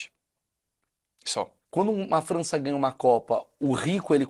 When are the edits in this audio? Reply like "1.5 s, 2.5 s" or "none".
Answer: 1.6 s